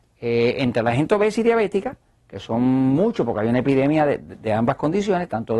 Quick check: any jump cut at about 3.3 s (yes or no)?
no